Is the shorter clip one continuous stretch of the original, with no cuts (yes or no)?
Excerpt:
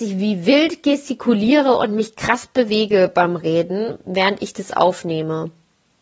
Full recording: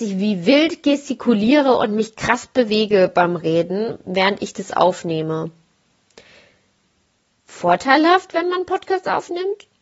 yes